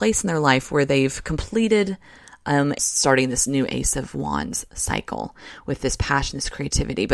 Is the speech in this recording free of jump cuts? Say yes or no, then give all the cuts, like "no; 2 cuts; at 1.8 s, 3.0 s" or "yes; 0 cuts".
no; 1 cut; at 2.8 s